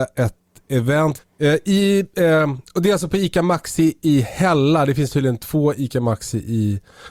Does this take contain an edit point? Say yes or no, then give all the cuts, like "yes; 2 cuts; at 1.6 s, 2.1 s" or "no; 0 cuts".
yes; 1 cut; at 1.2 s